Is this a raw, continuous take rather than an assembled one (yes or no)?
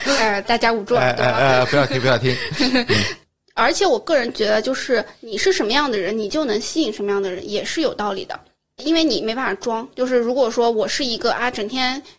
yes